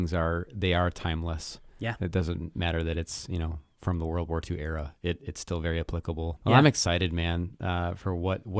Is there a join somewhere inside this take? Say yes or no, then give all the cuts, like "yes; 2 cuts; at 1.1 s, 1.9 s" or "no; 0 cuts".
yes; 1 cut; at 6.4 s